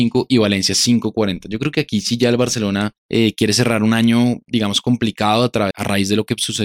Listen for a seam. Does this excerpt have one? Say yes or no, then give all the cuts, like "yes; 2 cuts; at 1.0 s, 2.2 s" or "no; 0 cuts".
yes; 2 cuts; at 3.0 s, 5.7 s